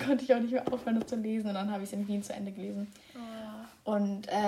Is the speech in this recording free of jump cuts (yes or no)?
yes